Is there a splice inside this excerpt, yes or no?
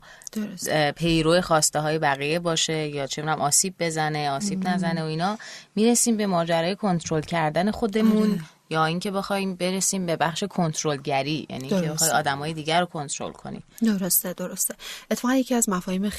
no